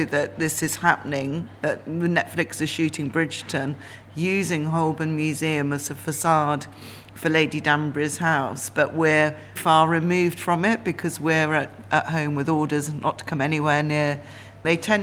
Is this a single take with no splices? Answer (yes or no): no